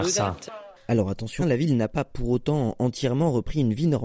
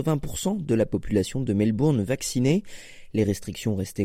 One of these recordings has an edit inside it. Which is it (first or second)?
first